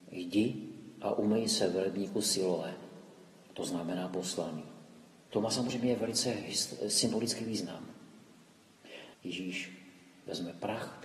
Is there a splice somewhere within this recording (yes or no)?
yes